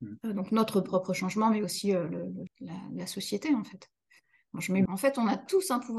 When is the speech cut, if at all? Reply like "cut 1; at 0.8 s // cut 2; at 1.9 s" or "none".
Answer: cut 1; at 2.5 s // cut 2; at 4.9 s